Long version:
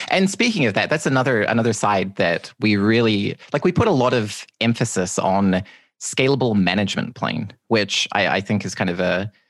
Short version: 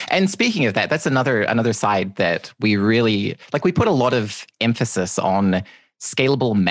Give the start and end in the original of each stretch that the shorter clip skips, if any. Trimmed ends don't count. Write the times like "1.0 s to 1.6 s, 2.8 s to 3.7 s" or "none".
none